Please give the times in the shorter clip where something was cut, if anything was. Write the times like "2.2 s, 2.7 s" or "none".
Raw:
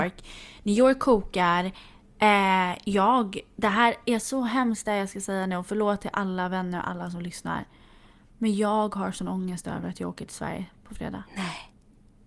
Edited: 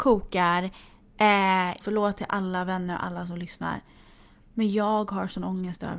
1.8 s